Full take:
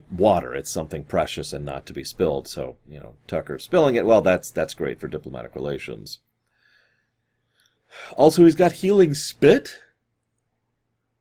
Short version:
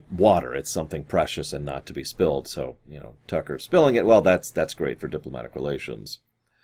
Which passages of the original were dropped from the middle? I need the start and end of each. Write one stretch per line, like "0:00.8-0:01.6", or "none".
none